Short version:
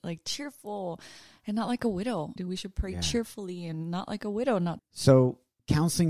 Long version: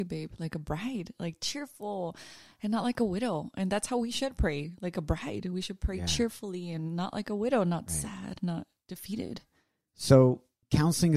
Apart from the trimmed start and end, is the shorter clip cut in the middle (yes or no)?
yes